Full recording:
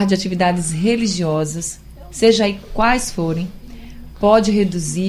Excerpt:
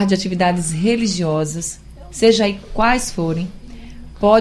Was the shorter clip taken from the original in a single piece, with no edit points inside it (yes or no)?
yes